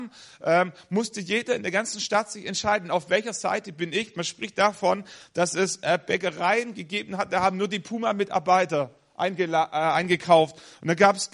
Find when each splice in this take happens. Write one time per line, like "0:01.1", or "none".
none